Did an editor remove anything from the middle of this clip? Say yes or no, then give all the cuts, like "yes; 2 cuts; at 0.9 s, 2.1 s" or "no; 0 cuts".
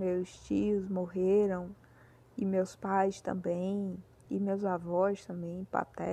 no; 0 cuts